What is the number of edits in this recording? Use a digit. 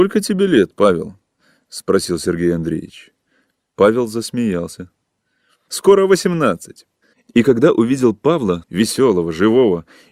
3